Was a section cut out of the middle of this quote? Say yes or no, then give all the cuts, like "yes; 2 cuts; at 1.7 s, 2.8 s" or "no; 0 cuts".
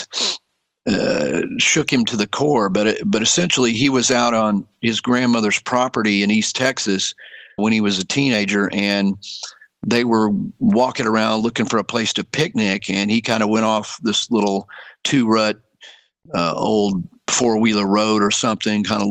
yes; 1 cut; at 7.6 s